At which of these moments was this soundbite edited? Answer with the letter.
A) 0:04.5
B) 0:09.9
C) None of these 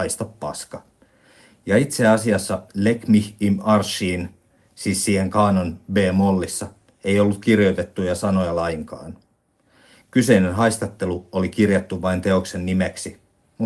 C